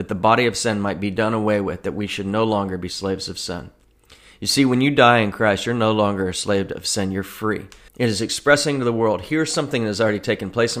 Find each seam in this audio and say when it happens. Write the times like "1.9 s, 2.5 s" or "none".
7.9 s